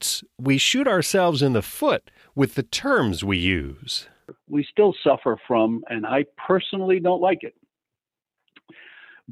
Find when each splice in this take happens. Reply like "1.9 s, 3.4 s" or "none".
none